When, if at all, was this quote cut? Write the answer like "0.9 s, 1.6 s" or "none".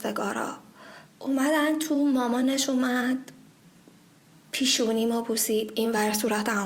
1.0 s

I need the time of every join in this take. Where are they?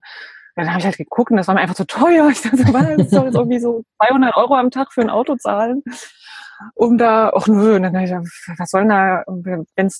none

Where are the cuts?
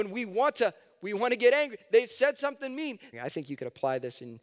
3.1 s

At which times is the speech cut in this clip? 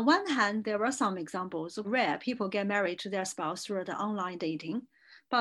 1.8 s

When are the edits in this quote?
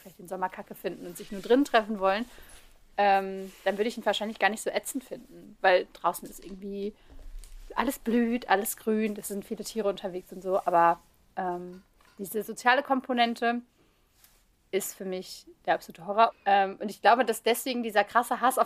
16.3 s

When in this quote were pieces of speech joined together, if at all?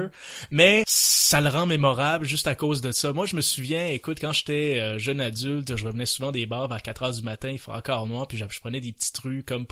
none

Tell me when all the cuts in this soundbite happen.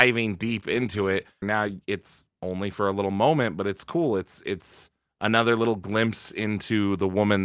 1.4 s

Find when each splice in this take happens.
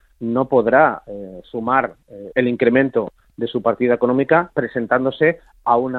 2.3 s

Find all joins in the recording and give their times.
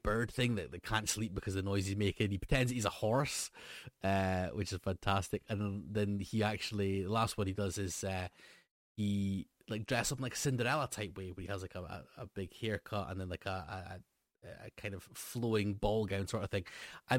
none

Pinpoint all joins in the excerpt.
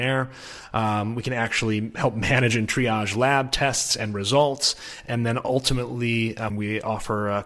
6.5 s

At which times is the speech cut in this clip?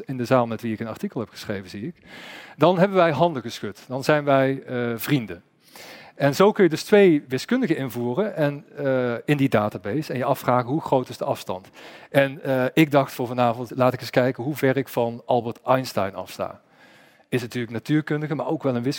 13.7 s

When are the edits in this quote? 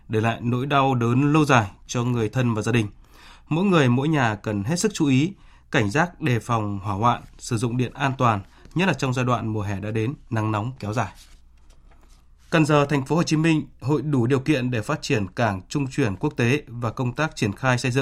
12.4 s

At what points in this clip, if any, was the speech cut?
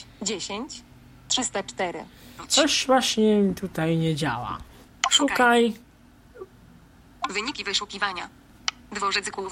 4.9 s

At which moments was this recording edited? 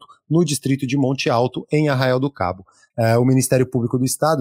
2.9 s

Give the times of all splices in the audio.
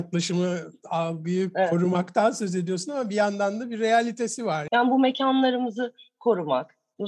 4.7 s

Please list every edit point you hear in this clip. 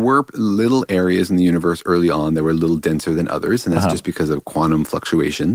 none

